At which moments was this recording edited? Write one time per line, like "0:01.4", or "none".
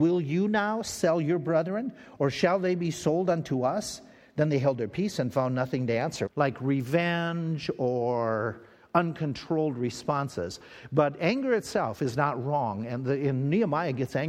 0:06.3